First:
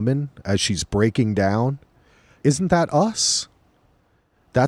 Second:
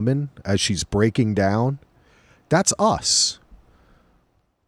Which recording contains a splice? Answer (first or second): first